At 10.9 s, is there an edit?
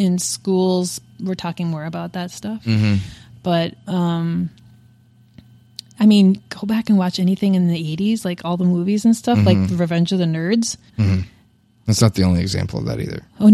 yes; 1 cut; at 10.9 s

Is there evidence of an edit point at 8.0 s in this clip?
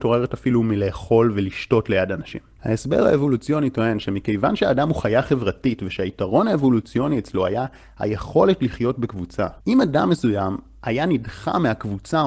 no; 2 cuts; at 2.6 s, 9.6 s

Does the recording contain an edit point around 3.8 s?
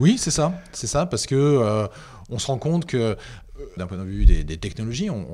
yes; 1 cut; at 3.8 s

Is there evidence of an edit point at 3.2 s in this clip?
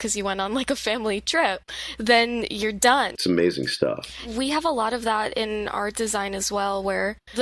yes; 1 cut; at 3.2 s

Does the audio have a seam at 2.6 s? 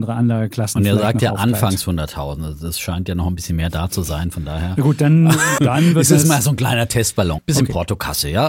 no; 2 cuts; at 5.6 s, 7.4 s

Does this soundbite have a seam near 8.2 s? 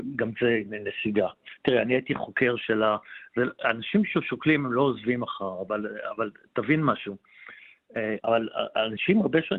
yes; 1 cut; at 8.2 s

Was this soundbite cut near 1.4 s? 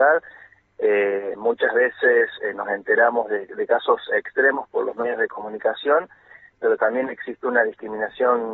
no; 0 cuts

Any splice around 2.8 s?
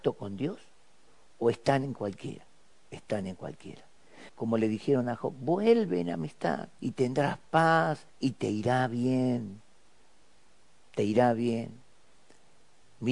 no; 3 cuts; at 4.3 s, 6.8 s, 8.1 s

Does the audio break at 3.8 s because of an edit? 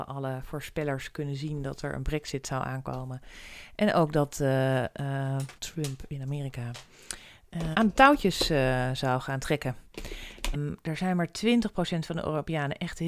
no; 3 cuts; at 5.6 s, 7.7 s, 10.5 s

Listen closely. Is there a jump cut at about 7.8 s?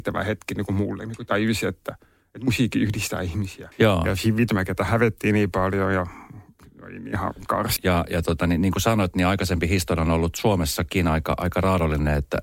yes; 2 cuts; at 3.7 s, 7.8 s

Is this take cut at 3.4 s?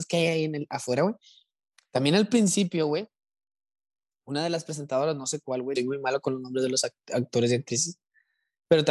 no; 1 cut; at 5.8 s

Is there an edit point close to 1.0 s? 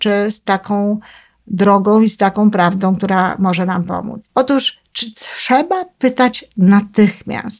no; 1 cut; at 4.3 s

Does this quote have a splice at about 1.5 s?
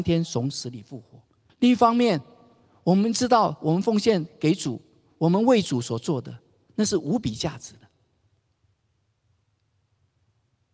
yes; 1 cut; at 1.5 s

